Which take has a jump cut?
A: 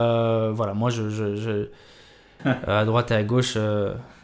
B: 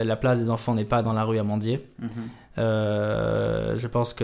A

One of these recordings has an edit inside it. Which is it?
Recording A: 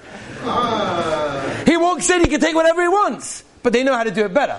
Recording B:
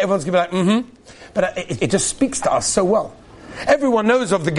B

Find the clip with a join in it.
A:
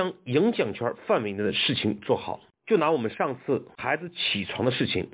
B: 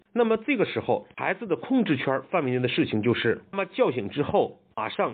B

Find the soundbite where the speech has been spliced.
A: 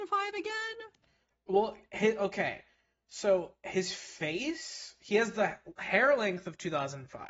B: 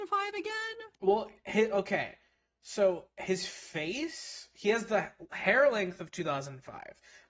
B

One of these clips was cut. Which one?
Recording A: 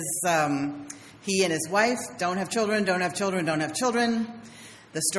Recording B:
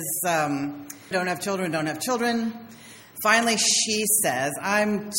B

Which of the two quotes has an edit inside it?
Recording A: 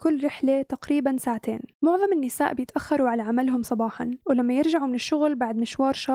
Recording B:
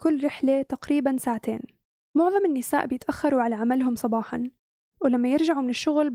A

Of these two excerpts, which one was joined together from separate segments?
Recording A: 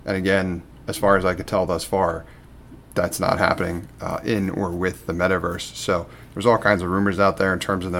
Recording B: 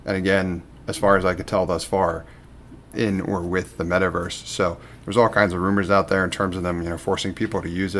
B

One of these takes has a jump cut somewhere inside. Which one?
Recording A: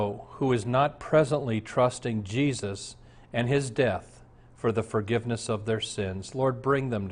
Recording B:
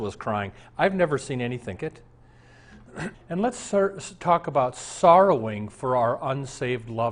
B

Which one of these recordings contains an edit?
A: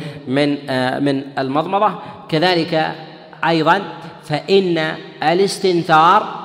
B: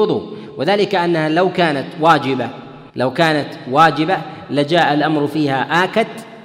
B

